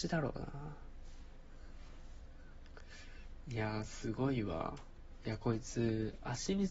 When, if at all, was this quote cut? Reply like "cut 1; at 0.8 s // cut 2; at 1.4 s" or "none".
cut 1; at 5.2 s